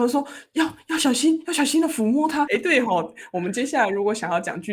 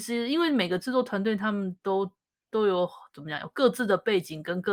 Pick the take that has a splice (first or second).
first